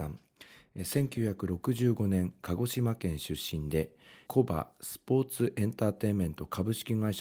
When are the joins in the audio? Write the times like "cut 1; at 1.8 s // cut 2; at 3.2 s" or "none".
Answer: cut 1; at 4.3 s